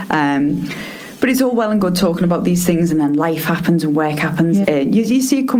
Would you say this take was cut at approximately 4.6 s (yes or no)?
yes